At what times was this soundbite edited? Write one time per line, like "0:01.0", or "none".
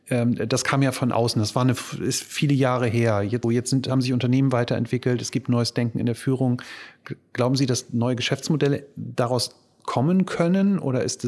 0:03.4